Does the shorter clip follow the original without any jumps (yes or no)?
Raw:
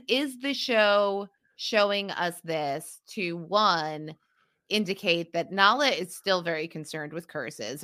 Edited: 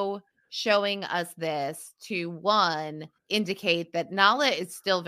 no